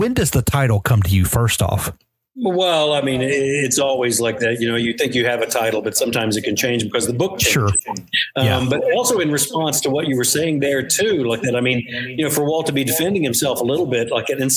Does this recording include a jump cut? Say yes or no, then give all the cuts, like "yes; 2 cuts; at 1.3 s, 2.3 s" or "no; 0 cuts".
no; 0 cuts